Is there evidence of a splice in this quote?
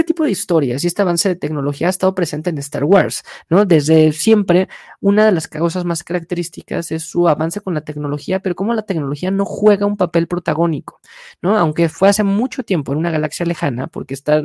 no; 0 cuts

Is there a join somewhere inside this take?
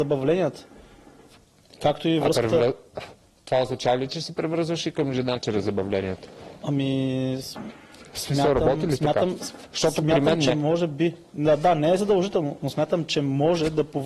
no; 0 cuts

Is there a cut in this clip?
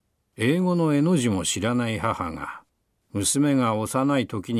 yes; 1 cut; at 3.0 s

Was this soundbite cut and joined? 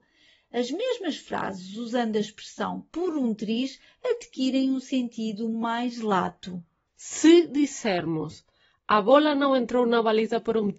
no; 0 cuts

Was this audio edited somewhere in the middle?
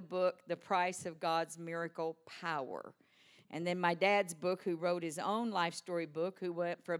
no; 0 cuts

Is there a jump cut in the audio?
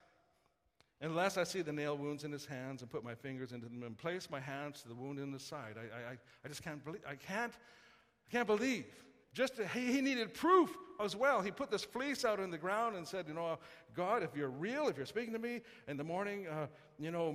yes; 1 cut; at 9.2 s

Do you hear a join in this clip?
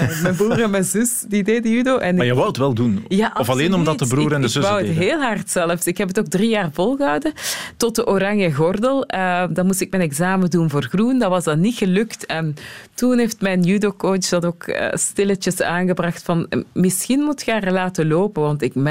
no; 0 cuts

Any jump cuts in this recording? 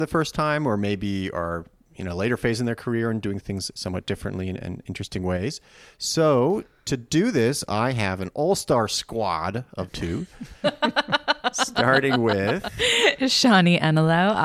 no; 0 cuts

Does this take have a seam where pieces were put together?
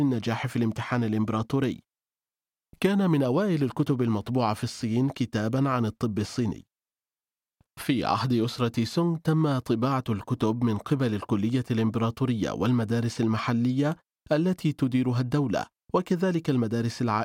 no; 0 cuts

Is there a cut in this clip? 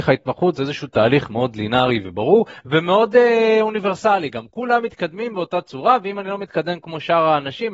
no; 0 cuts

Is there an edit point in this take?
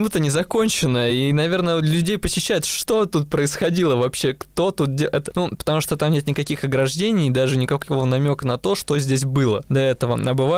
no; 0 cuts

